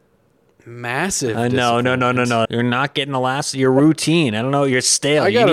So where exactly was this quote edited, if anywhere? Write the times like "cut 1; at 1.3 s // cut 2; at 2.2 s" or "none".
cut 1; at 2.4 s